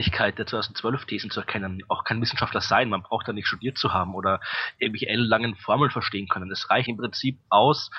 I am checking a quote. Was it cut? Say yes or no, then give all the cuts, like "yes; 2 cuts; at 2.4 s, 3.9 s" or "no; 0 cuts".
yes; 1 cut; at 6.9 s